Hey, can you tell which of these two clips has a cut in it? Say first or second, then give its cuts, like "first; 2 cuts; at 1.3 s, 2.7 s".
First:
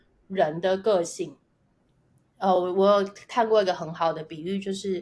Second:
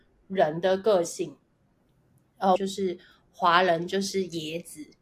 second; 1 cut; at 2.6 s